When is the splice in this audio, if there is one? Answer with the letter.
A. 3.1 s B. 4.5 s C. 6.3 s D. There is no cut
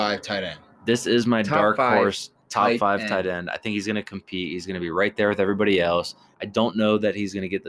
C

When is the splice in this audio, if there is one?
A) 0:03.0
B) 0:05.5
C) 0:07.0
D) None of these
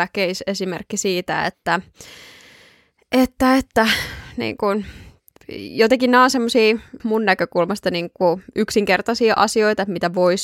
C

